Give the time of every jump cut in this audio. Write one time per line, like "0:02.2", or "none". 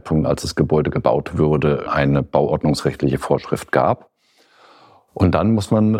0:01.9

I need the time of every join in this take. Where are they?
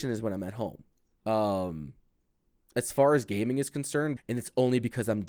0:01.1
0:04.2

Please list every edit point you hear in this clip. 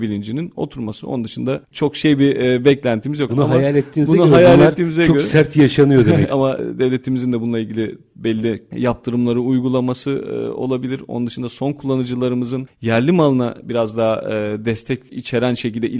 0:03.3
0:06.3

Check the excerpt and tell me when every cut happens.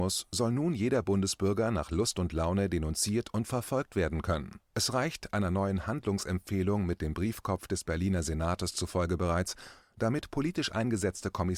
0:04.6
0:09.8

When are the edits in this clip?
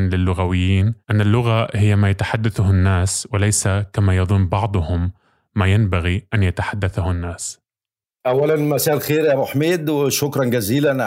0:01.0

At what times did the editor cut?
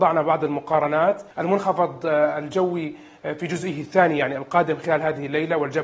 0:01.3

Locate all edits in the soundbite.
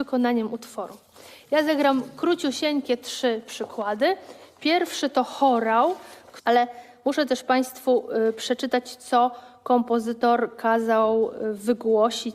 0:06.4

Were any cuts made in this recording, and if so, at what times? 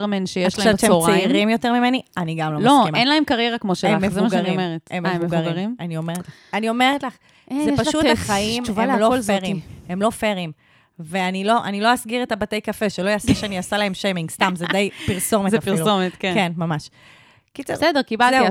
none

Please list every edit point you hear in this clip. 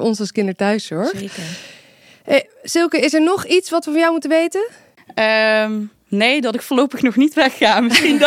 none

